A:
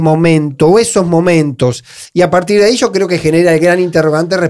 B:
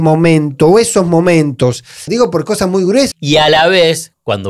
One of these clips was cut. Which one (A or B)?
B